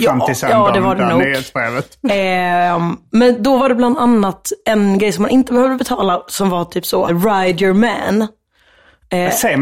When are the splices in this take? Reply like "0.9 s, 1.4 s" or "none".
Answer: 7.1 s